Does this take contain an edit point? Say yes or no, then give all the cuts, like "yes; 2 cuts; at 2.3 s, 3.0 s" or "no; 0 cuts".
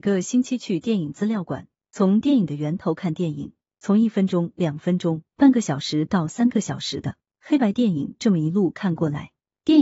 no; 0 cuts